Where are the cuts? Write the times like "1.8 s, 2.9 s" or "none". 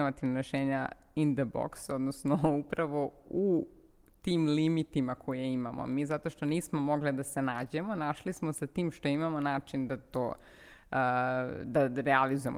none